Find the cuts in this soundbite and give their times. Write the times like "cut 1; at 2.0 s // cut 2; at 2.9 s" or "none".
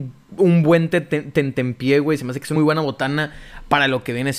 cut 1; at 2.6 s